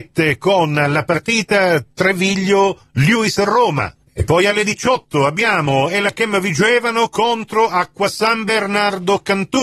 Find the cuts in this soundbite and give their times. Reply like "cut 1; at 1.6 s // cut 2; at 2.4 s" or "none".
cut 1; at 4.0 s